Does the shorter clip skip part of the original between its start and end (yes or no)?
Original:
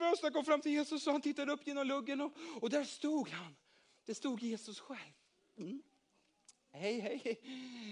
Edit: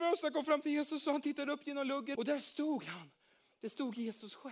yes